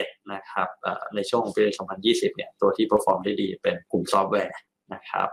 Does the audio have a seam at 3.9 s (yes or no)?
yes